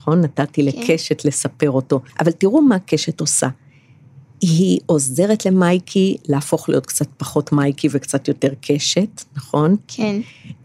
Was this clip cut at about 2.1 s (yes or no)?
yes